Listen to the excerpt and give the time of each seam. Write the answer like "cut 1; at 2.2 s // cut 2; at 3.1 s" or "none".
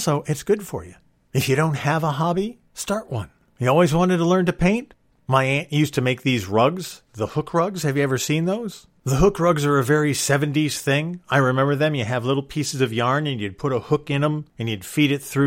cut 1; at 5.1 s